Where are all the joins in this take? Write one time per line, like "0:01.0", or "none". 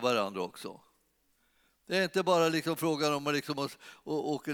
none